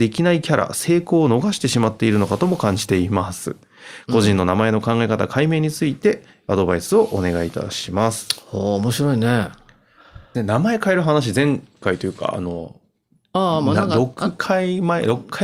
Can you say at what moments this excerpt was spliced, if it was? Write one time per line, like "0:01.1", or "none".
0:10.3